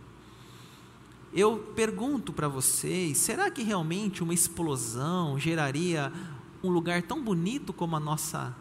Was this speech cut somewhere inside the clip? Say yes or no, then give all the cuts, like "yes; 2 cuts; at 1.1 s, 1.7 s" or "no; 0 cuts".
yes; 1 cut; at 6.6 s